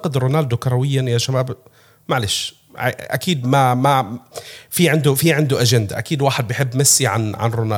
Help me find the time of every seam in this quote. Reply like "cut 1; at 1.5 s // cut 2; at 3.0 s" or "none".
cut 1; at 3.4 s

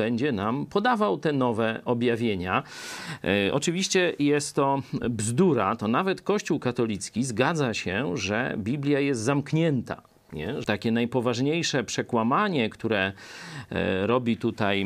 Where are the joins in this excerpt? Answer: cut 1; at 10.6 s

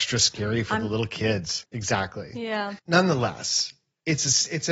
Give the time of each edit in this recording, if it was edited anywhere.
cut 1; at 1.6 s // cut 2; at 2.8 s

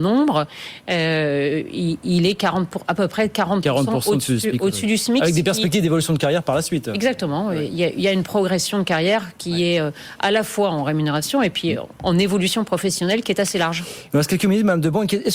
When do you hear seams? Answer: none

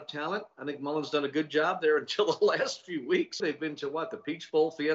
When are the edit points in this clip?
cut 1; at 3.4 s

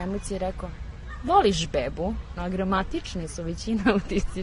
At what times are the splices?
cut 1; at 2.4 s

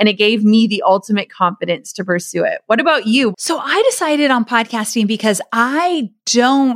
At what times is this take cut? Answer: cut 1; at 3.3 s

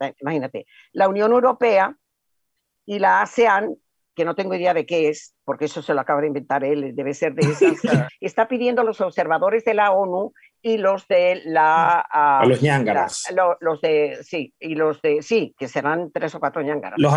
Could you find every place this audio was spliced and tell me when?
cut 1; at 8.1 s

